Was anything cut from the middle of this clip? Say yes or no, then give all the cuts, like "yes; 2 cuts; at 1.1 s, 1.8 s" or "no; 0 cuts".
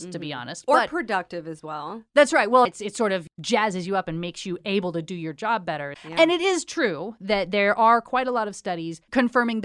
yes; 2 cuts; at 2.7 s, 5.9 s